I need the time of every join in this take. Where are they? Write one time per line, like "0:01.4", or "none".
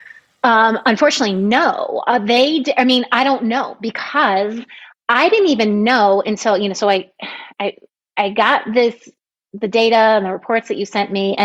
none